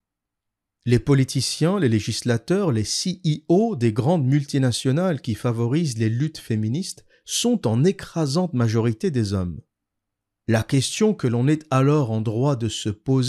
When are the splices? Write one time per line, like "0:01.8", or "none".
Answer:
none

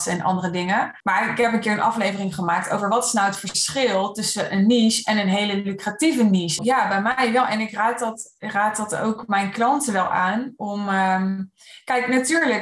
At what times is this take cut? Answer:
0:01.0
0:06.6

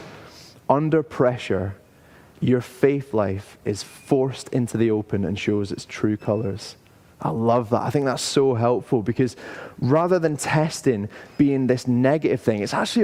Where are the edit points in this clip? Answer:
none

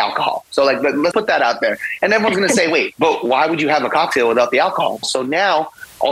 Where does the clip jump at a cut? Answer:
0:01.1
0:05.0

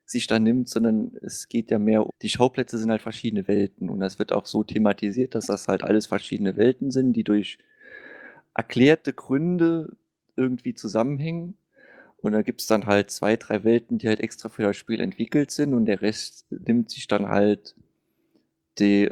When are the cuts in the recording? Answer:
0:02.1

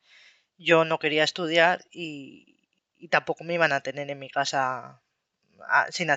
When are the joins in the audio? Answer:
none

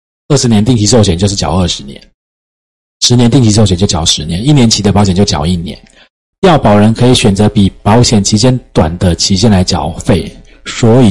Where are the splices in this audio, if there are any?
0:06.3

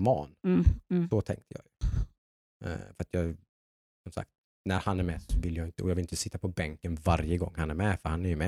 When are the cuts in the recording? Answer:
none

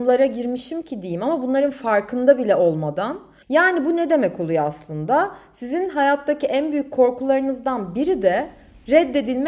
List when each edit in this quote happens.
0:03.4

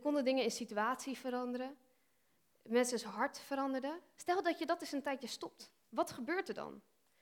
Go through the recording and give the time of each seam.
0:04.2
0:05.8

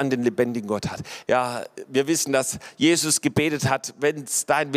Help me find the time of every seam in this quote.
0:01.2

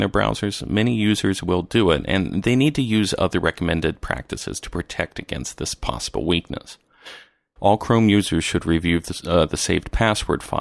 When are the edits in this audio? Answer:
0:07.6

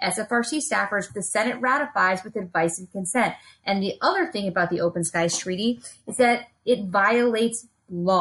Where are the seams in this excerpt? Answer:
0:01.1

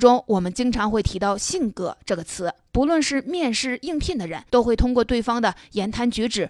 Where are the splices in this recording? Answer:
0:04.5

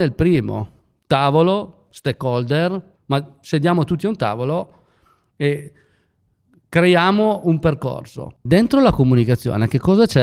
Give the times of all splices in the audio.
0:03.0
0:08.5

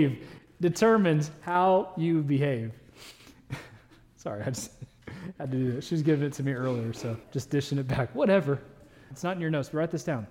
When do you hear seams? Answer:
0:07.2
0:09.1

